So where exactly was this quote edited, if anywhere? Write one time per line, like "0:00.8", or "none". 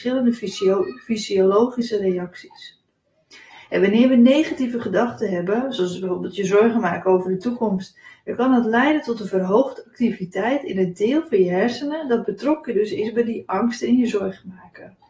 0:08.2